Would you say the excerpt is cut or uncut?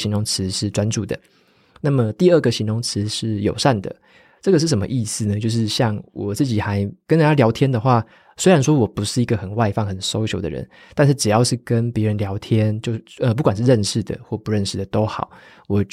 uncut